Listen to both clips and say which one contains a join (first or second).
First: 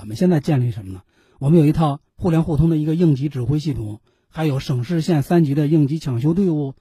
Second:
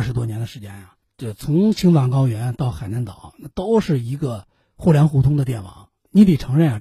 first